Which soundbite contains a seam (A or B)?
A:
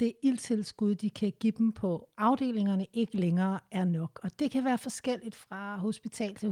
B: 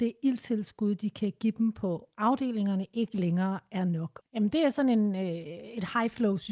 B